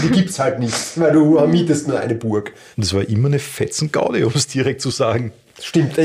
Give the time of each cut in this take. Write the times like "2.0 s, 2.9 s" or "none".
2.7 s